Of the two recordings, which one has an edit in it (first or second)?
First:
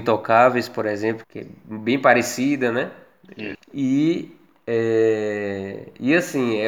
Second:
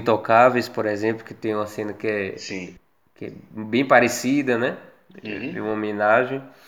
first